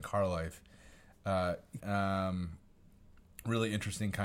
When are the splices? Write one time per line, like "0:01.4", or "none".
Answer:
0:01.8